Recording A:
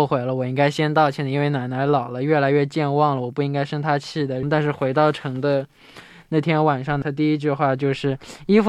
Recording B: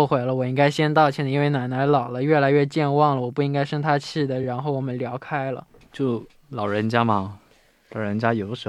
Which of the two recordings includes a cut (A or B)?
A